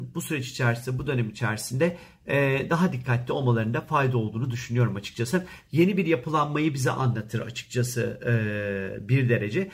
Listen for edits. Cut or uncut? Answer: cut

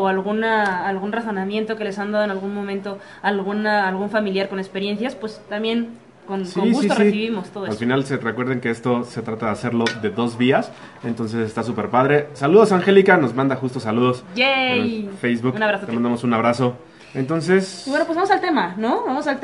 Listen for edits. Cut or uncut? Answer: uncut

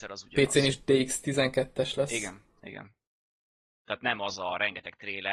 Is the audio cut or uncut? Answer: cut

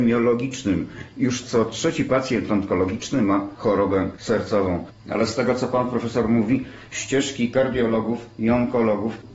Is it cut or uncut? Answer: cut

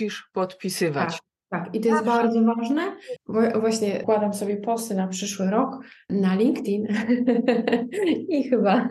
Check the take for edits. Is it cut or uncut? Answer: uncut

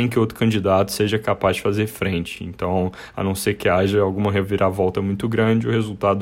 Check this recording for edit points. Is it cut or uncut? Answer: uncut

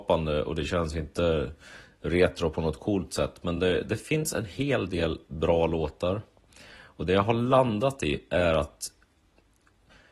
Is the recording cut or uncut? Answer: uncut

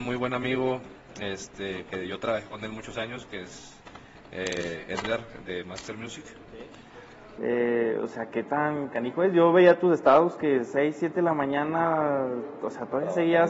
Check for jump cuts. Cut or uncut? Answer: cut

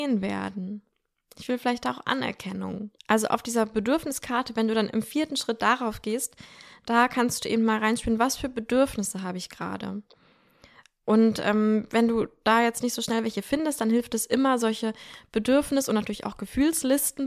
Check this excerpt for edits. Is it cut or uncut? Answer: cut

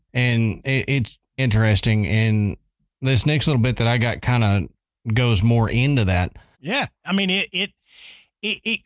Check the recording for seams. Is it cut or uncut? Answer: cut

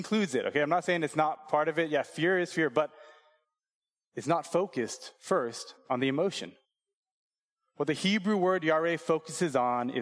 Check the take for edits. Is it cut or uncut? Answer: uncut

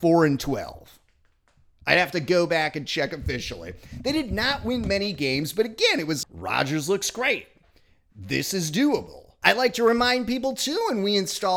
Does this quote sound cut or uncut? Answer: cut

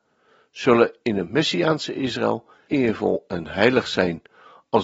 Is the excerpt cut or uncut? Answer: cut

